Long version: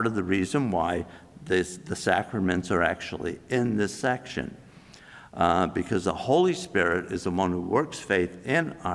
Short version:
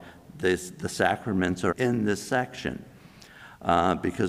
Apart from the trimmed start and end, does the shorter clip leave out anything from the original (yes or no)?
yes